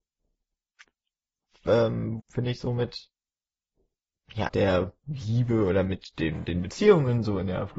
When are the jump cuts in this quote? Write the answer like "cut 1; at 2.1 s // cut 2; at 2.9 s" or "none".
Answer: cut 1; at 2.2 s // cut 2; at 4.5 s